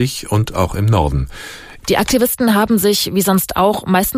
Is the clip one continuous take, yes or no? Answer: no